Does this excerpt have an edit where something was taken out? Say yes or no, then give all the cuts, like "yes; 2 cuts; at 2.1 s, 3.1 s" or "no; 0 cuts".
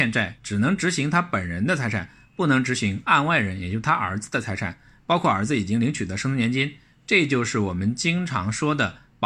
no; 0 cuts